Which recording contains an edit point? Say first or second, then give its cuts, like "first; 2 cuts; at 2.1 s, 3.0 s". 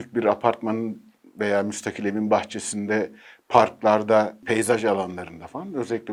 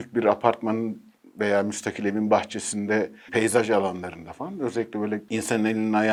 second; 1 cut; at 3.3 s